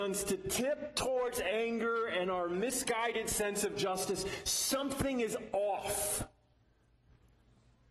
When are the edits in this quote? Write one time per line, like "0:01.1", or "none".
none